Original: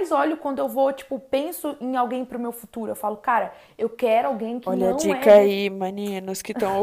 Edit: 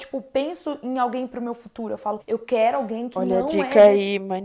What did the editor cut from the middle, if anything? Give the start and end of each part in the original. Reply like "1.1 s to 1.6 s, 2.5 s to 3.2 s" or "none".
3.2 s to 3.7 s